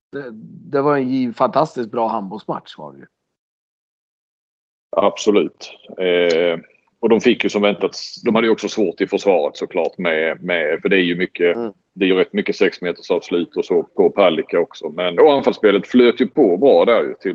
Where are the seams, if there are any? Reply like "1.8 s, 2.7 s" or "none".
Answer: 13.8 s, 15.2 s